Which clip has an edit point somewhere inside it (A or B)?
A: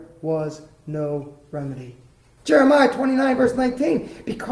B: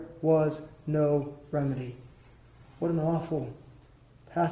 A